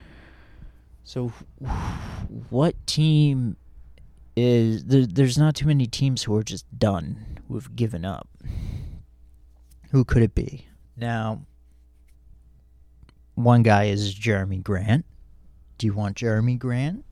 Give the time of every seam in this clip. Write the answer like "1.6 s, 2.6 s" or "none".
none